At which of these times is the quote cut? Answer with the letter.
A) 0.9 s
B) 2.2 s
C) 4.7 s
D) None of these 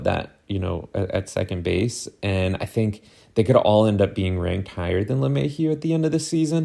D